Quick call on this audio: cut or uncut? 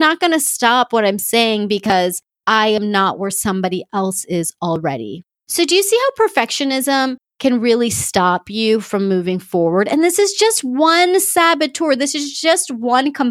uncut